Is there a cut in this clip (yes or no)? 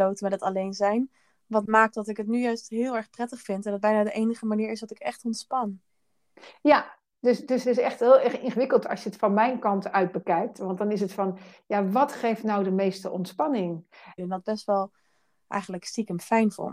yes